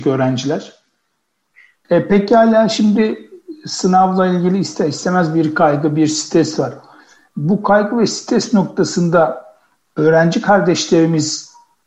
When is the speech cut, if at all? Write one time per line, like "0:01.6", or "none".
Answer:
0:01.8